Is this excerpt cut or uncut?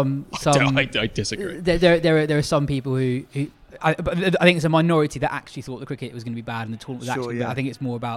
uncut